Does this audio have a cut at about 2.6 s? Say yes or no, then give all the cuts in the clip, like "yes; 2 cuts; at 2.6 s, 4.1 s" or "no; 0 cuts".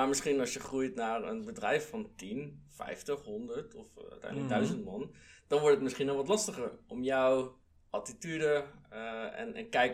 no; 0 cuts